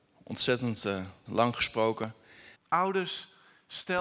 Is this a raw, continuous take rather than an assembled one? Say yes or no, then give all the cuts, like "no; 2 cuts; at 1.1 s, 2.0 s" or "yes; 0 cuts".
no; 2 cuts; at 1.3 s, 2.6 s